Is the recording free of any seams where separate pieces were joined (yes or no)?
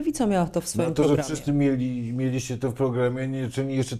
yes